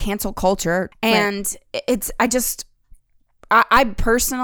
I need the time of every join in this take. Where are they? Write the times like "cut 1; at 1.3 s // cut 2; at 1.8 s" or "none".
cut 1; at 0.9 s